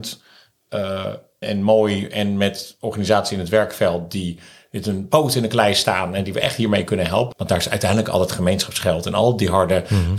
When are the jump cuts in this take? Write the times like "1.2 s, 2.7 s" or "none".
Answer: 1.4 s, 7.3 s